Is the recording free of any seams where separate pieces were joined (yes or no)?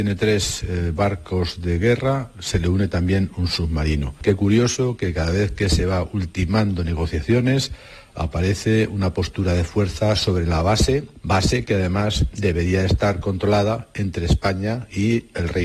yes